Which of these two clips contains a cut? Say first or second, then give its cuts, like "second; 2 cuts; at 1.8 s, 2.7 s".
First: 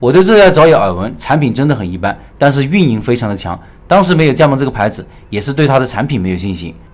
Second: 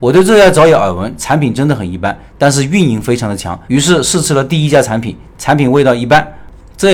second; 1 cut; at 3.7 s